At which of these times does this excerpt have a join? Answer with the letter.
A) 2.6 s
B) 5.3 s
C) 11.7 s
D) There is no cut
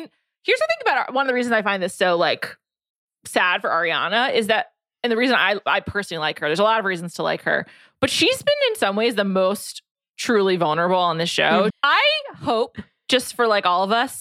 C